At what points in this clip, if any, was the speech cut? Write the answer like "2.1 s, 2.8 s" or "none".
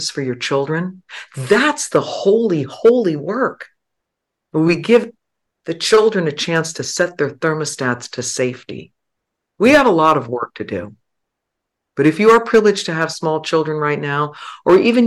none